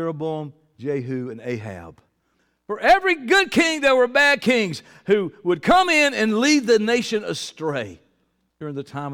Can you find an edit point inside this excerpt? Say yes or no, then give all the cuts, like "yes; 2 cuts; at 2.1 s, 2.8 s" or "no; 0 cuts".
no; 0 cuts